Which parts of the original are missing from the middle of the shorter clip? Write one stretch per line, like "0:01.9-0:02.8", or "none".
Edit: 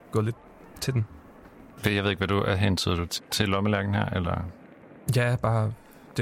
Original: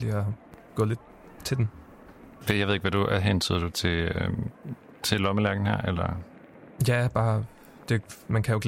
0:03.8-0:04.9